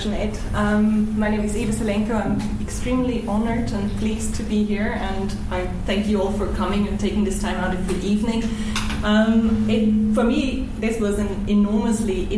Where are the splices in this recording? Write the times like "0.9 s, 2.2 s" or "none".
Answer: none